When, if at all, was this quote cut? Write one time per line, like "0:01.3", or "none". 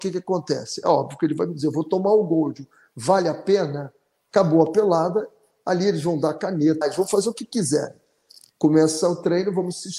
0:04.3
0:06.8